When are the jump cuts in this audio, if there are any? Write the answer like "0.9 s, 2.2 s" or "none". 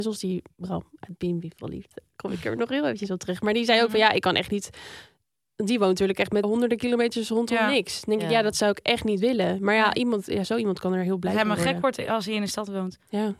6.4 s